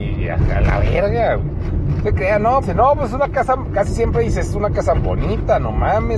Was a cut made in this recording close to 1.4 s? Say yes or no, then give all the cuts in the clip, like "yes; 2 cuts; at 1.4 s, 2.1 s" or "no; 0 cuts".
no; 2 cuts; at 2.6 s, 4.9 s